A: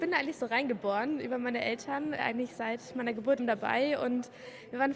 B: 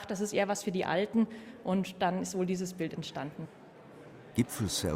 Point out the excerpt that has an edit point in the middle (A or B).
A